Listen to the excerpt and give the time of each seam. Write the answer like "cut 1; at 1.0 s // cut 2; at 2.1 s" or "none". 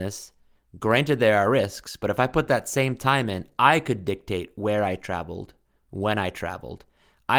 none